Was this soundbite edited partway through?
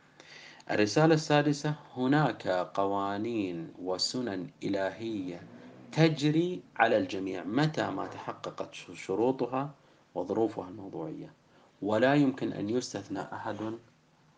yes; 1 cut; at 6.7 s

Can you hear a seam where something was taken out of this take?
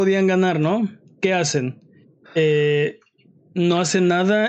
no; 0 cuts

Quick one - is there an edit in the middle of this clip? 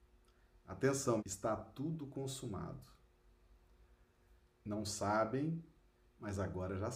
yes; 2 cuts; at 1.2 s, 4.4 s

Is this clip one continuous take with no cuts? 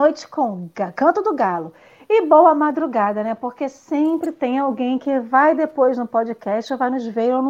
yes; 0 cuts

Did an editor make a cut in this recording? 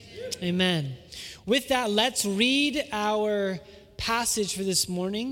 no; 0 cuts

